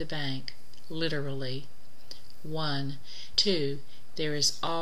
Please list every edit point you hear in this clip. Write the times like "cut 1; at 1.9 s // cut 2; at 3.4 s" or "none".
cut 1; at 3.3 s